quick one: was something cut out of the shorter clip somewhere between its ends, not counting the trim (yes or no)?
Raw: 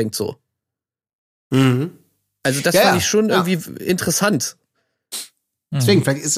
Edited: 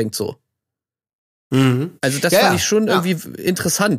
yes